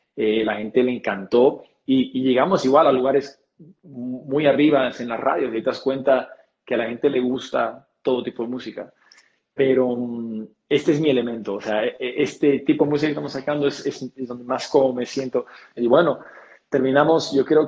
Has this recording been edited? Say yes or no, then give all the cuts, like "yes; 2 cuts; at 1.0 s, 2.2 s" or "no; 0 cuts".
yes; 1 cut; at 15.8 s